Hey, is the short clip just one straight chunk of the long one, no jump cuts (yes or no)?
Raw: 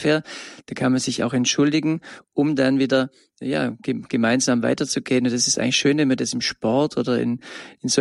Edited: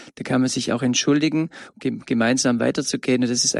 no